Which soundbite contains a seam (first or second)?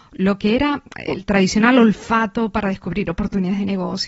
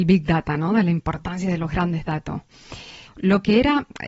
second